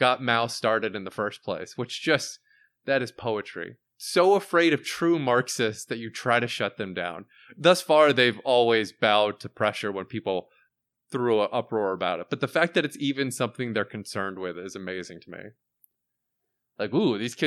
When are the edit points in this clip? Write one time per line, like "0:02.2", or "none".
0:03.9